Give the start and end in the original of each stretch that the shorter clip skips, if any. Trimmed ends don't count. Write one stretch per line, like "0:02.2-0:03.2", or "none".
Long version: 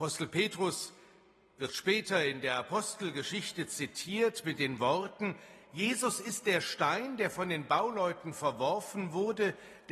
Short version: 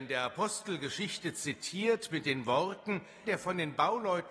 0:05.6-0:07.2